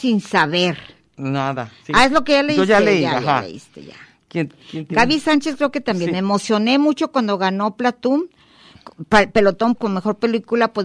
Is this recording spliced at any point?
yes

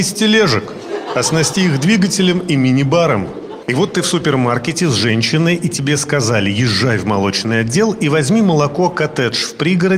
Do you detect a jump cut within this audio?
yes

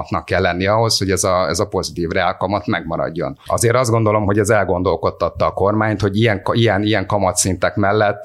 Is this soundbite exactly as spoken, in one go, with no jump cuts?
yes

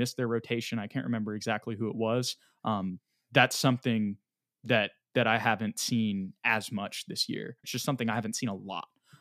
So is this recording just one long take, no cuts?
no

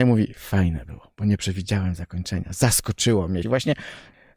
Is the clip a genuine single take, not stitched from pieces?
no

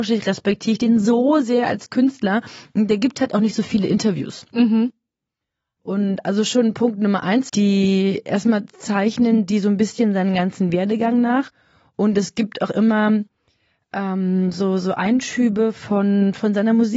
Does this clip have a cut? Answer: yes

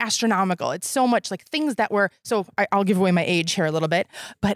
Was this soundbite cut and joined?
no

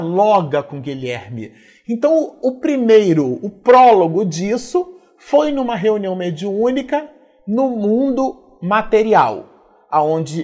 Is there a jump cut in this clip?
no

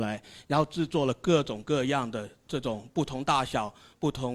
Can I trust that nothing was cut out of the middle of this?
yes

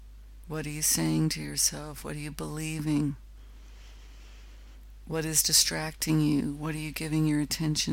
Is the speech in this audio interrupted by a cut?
no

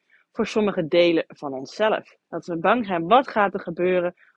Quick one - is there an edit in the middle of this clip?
yes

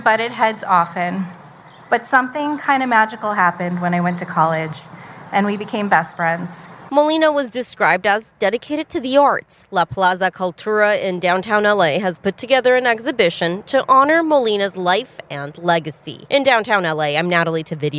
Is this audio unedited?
yes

